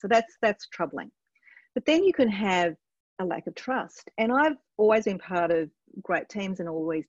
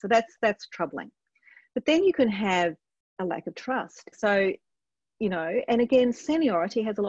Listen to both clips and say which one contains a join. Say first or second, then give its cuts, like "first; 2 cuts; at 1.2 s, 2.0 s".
second; 1 cut; at 4.1 s